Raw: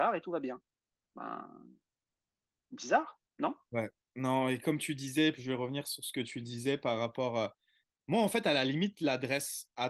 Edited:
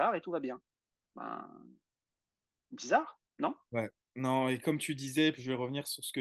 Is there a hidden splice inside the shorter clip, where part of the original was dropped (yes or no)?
no